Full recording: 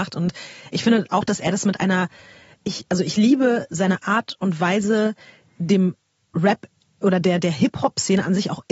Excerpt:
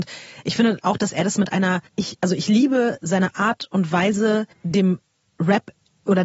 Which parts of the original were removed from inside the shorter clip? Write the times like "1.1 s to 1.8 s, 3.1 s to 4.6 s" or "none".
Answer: 2.1 s to 2.6 s, 5.2 s to 5.5 s